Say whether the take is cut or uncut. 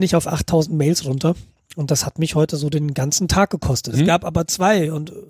cut